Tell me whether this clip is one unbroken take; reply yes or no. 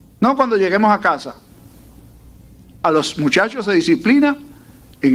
yes